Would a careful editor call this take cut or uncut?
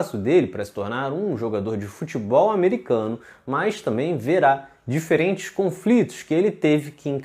uncut